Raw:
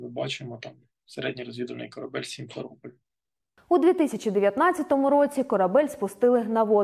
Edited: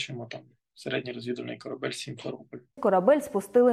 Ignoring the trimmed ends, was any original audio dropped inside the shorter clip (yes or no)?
yes